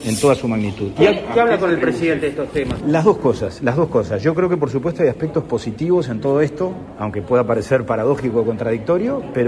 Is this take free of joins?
no; 1 cut; at 2.8 s

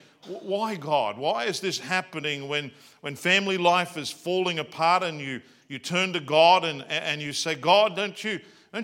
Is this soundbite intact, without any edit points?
yes; 0 cuts

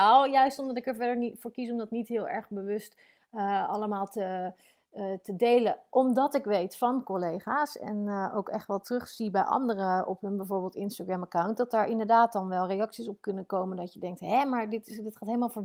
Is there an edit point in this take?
no; 0 cuts

